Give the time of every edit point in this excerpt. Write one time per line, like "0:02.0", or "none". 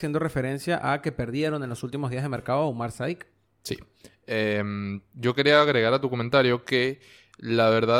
none